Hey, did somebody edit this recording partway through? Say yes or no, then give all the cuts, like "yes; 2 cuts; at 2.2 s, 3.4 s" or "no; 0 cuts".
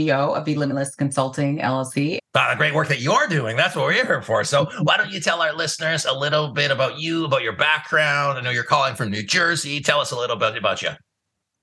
yes; 1 cut; at 2.2 s